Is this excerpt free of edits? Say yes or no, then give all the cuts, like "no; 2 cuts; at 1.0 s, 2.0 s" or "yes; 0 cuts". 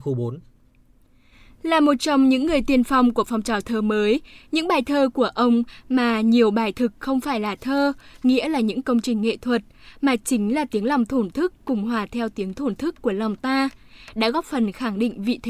yes; 0 cuts